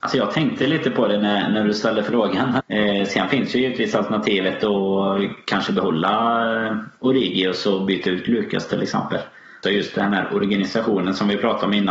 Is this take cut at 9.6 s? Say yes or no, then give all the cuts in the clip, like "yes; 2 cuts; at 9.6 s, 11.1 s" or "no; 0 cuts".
yes; 2 cuts; at 2.6 s, 9.6 s